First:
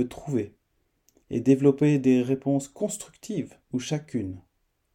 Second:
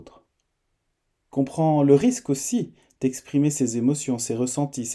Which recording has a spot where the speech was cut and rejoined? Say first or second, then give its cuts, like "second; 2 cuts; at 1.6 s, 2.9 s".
first; 1 cut; at 3.6 s